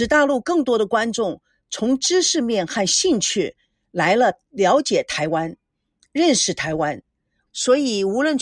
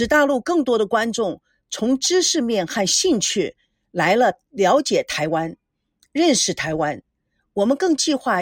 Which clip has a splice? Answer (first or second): first